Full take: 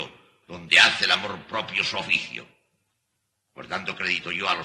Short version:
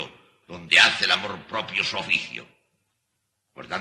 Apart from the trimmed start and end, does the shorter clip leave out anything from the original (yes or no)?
no